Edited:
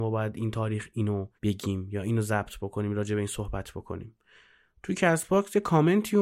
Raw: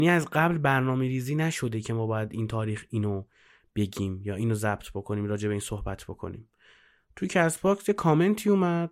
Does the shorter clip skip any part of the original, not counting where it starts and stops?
yes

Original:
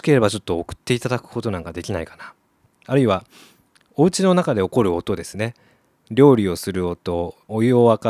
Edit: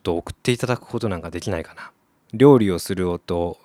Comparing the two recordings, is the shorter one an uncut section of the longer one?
no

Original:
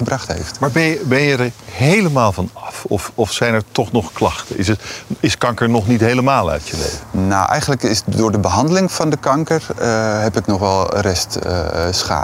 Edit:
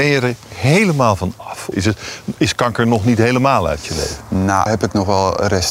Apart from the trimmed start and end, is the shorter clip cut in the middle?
yes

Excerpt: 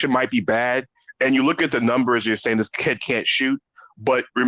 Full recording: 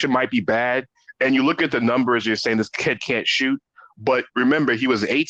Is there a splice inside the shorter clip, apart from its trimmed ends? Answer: no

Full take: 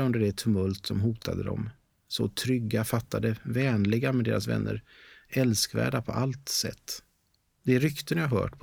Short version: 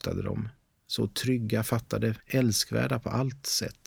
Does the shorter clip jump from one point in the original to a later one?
yes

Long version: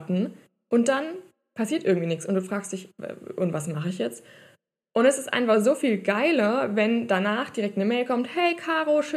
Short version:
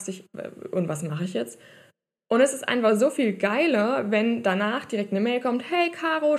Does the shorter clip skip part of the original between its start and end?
no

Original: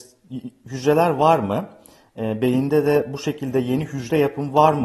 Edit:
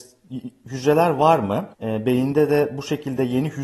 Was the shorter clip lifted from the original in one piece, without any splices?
no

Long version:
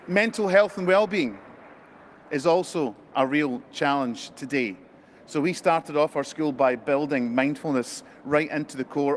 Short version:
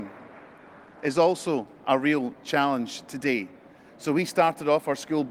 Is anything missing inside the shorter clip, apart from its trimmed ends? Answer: no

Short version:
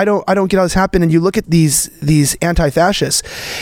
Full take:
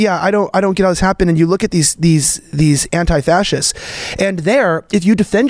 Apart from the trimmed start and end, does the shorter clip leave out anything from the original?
yes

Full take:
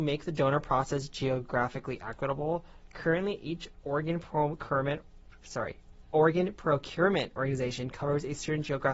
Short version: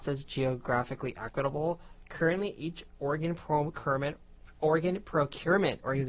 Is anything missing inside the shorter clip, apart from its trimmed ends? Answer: yes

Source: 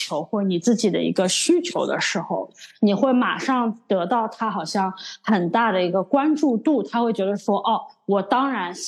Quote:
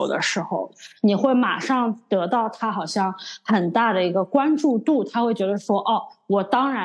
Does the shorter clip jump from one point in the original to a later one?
no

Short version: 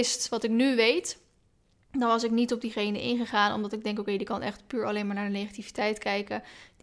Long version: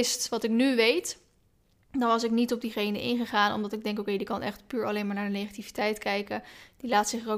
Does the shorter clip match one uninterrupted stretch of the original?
yes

